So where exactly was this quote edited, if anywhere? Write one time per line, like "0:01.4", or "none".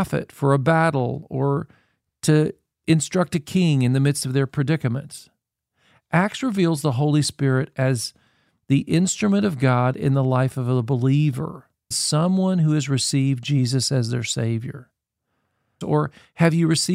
0:11.9
0:15.8